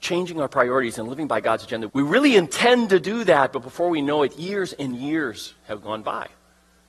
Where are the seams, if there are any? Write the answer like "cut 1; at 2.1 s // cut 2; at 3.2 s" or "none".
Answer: cut 1; at 1.9 s